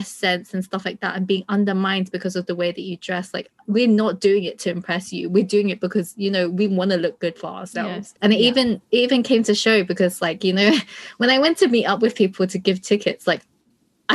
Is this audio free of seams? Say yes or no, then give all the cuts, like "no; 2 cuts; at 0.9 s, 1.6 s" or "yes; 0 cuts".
no; 1 cut; at 8.2 s